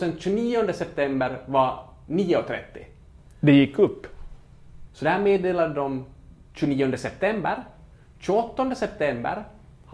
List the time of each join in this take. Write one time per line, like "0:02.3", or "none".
0:04.9